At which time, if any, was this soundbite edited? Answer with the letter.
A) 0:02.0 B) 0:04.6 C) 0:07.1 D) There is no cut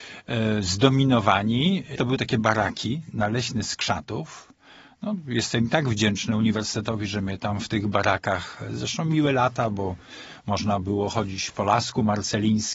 A